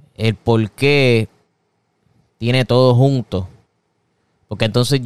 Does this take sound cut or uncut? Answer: uncut